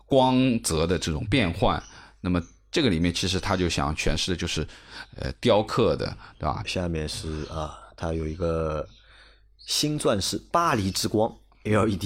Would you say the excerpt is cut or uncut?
cut